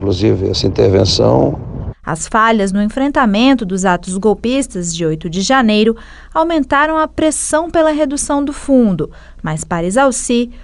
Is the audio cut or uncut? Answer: cut